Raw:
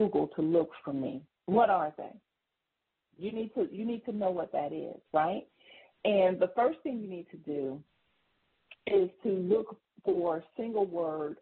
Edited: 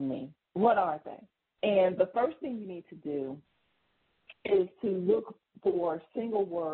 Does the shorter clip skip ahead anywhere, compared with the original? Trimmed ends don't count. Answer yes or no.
yes